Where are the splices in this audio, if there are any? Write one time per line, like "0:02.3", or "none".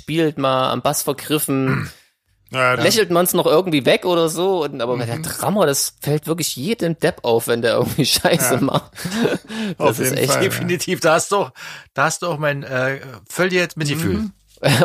0:02.8